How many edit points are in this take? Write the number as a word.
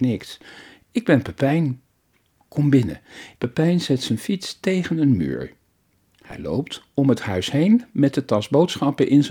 one